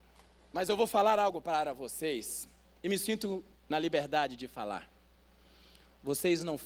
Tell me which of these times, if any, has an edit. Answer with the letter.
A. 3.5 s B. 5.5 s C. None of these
A